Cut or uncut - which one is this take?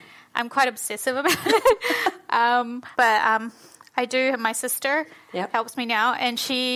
cut